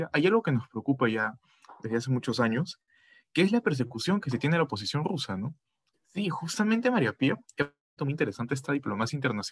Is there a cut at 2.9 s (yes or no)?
no